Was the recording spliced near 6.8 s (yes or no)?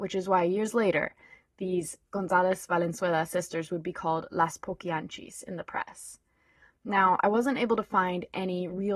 no